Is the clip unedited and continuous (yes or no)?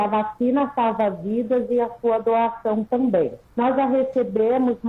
no